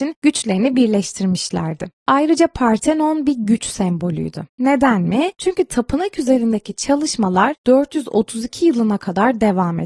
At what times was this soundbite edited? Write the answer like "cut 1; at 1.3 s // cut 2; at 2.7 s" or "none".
none